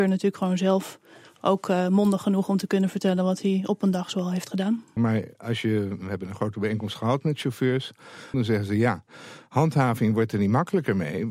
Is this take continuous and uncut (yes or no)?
no